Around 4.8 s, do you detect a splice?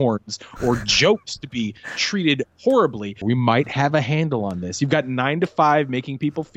no; 1 cut; at 3.2 s

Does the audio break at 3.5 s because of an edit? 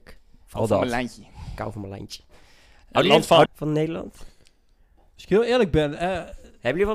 yes; 1 cut; at 3.5 s

